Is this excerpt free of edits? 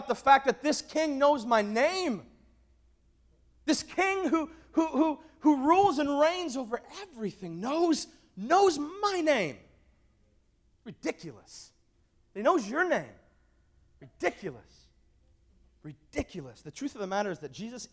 yes; 0 cuts

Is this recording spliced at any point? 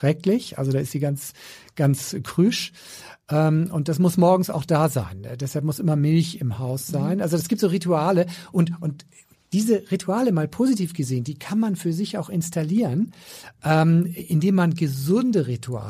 no; 0 cuts

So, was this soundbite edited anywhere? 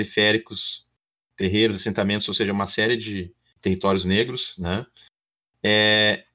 no; 0 cuts

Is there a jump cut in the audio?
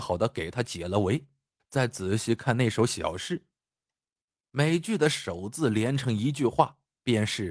yes; 1 cut; at 1.6 s

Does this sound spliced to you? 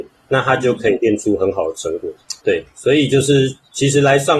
yes; 1 cut; at 2.4 s

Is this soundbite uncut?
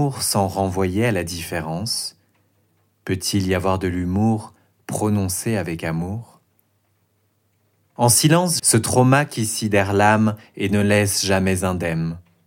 no; 1 cut; at 8.6 s

